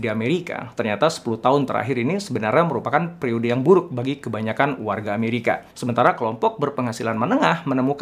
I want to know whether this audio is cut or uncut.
cut